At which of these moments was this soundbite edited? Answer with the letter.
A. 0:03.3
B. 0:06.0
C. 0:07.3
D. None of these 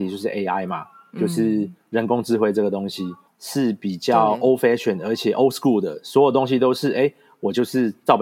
A